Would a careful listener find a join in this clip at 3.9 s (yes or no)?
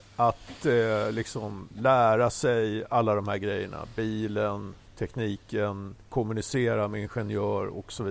no